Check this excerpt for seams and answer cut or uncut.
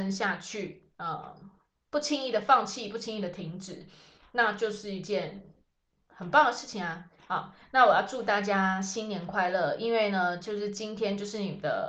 uncut